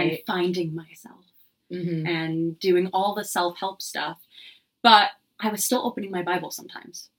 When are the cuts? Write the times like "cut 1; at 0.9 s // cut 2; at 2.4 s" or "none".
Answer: none